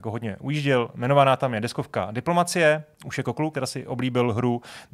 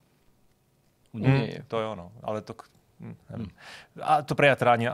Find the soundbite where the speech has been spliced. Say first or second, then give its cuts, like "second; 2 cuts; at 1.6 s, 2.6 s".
first; 1 cut; at 3.5 s